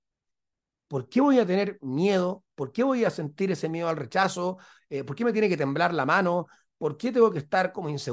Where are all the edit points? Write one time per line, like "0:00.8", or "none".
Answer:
none